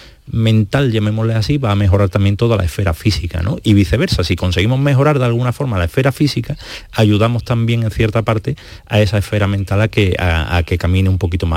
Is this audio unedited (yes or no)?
yes